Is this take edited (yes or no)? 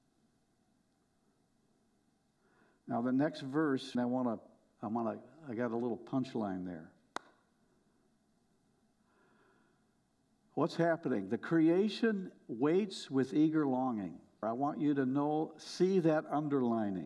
yes